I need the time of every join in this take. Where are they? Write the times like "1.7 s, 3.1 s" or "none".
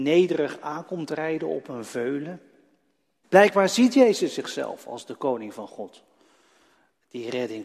3.2 s